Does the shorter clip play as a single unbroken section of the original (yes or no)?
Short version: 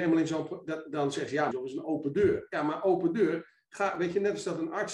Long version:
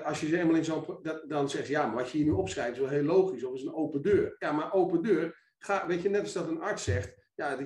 no